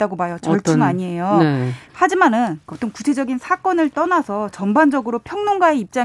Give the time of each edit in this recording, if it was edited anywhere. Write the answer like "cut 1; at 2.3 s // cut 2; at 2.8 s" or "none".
cut 1; at 1.9 s